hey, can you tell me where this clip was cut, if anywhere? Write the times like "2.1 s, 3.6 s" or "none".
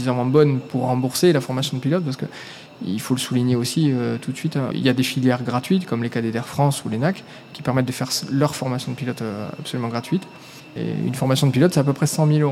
4.7 s, 10.8 s